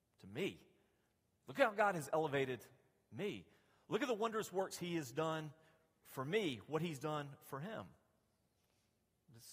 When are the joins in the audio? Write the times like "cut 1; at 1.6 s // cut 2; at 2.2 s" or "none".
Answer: none

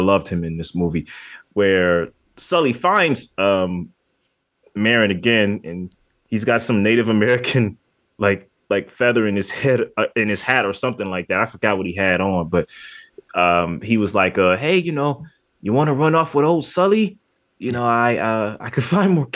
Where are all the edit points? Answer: none

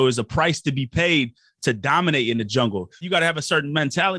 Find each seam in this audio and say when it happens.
cut 1; at 3.0 s

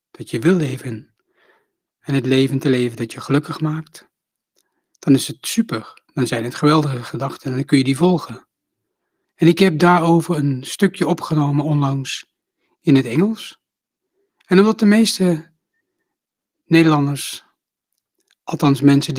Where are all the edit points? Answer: cut 1; at 9.2 s

